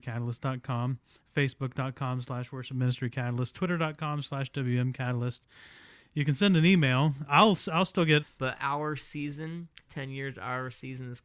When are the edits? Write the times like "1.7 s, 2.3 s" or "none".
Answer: 8.2 s, 9.9 s